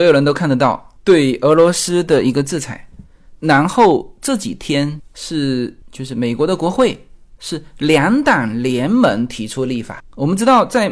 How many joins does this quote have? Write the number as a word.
one